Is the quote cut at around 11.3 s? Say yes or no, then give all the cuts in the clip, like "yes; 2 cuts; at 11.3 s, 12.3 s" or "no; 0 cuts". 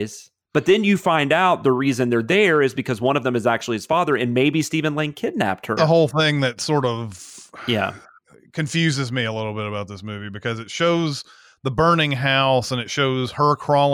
no; 1 cut; at 5.8 s